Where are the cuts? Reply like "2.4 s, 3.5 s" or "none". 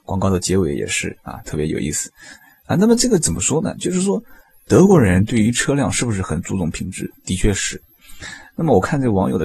none